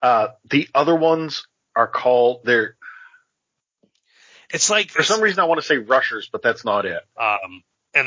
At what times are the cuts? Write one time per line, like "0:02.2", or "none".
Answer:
0:07.2